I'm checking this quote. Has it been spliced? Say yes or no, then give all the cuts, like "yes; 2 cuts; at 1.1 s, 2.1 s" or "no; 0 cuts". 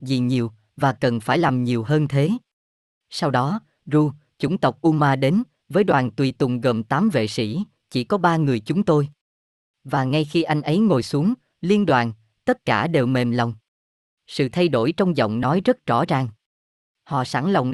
no; 0 cuts